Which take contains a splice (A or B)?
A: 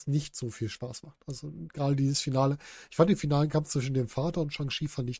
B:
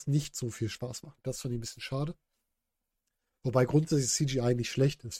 B